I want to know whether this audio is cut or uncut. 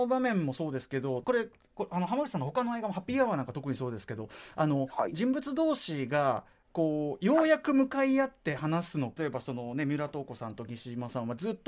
cut